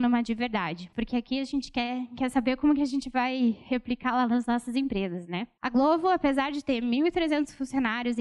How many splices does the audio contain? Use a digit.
1